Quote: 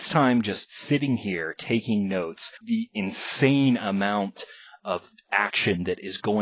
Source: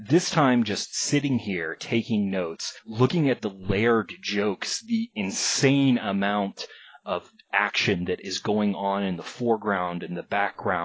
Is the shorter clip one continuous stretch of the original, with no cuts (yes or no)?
no